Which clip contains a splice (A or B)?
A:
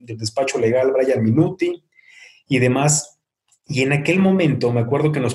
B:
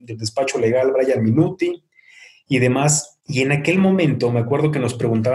B